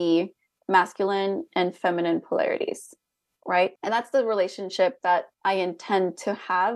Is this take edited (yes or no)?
yes